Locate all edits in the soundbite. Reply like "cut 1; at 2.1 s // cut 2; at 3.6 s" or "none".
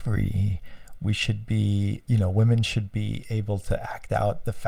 cut 1; at 2.1 s